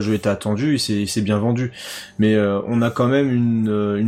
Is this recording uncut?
yes; 0 cuts

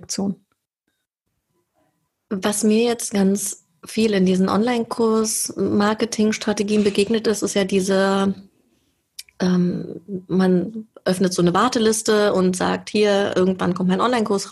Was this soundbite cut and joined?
no; 0 cuts

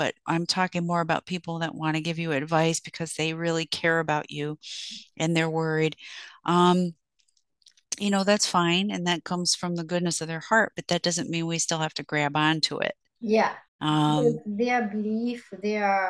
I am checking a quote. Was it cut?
yes; 1 cut; at 13.7 s

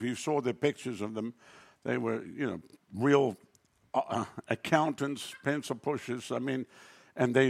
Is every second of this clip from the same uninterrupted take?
yes; 0 cuts

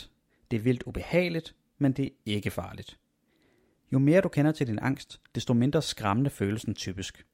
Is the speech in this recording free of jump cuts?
yes; 0 cuts

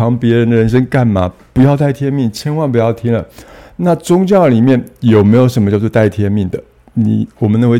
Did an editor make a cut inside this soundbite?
no; 0 cuts

